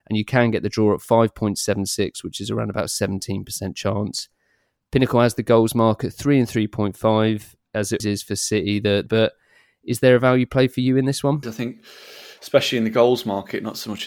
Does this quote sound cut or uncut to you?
cut